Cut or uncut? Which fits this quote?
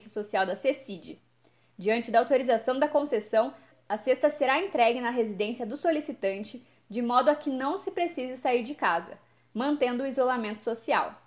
uncut